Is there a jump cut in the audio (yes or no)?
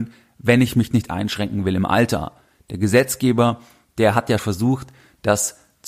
yes